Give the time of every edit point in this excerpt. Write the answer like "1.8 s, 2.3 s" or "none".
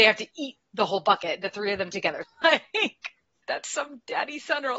2.2 s, 3.4 s